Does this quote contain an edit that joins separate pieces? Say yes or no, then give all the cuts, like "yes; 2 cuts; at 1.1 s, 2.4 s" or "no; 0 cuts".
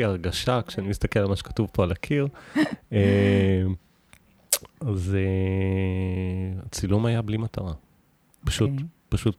no; 0 cuts